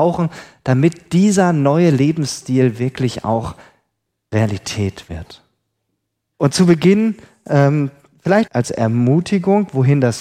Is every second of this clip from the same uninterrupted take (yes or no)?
no